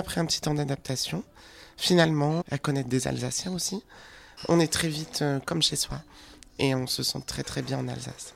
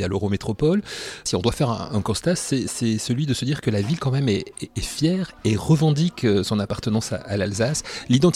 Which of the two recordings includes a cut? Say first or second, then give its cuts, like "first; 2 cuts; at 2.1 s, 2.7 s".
first; 1 cut; at 2.4 s